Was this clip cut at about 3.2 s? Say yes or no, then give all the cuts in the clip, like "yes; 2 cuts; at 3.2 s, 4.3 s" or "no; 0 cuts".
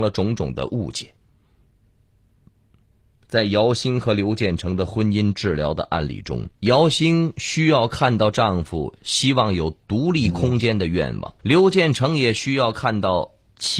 no; 2 cuts; at 6.5 s, 11.4 s